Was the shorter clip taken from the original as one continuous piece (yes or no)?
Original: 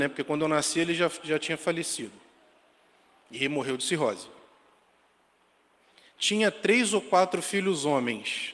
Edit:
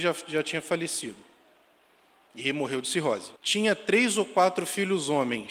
no